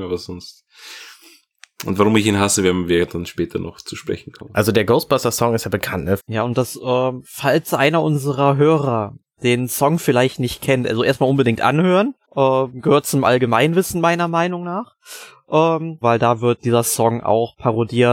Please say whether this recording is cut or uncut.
cut